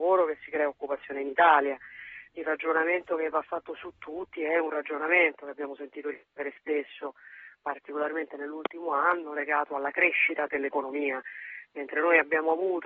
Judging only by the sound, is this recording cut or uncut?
cut